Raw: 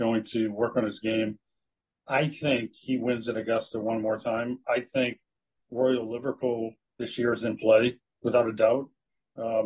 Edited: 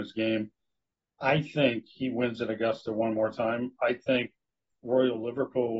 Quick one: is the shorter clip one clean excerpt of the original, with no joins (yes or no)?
yes